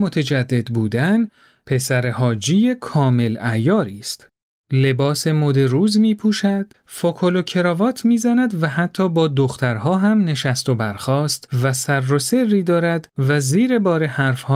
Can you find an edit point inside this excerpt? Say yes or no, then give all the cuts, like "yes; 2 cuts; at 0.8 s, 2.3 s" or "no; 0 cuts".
yes; 1 cut; at 6.7 s